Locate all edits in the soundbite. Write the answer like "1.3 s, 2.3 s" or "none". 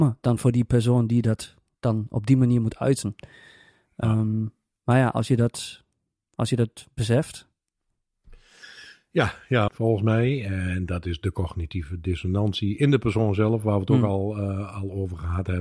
9.7 s